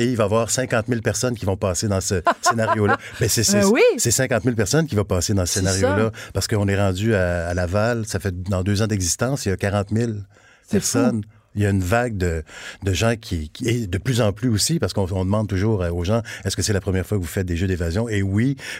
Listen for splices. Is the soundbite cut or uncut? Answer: uncut